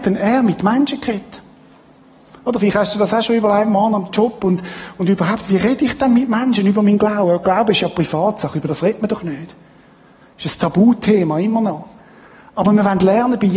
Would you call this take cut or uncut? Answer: uncut